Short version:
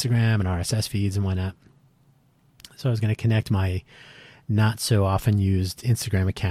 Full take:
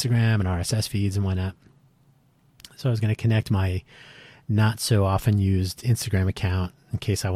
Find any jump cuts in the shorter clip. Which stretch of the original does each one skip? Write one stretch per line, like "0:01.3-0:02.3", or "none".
none